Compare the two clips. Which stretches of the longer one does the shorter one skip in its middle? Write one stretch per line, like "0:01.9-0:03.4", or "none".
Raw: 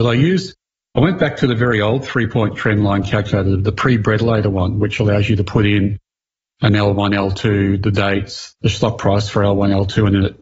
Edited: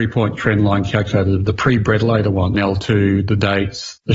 0:04.7-0:07.1